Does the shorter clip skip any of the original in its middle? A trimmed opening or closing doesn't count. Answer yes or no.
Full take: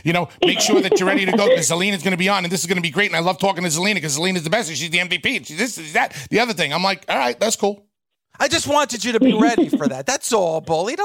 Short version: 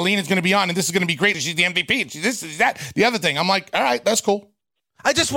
yes